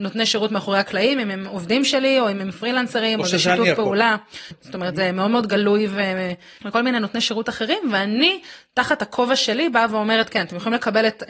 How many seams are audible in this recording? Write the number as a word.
two